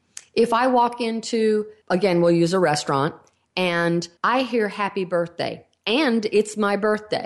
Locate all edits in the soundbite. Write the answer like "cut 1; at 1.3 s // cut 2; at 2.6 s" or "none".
cut 1; at 1.8 s // cut 2; at 4.2 s